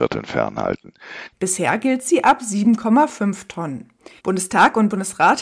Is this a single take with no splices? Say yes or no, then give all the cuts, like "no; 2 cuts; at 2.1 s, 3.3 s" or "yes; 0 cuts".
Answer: no; 2 cuts; at 1.3 s, 4.2 s